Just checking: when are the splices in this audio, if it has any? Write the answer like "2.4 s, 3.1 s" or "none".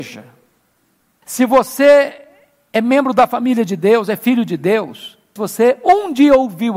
1.2 s, 5.4 s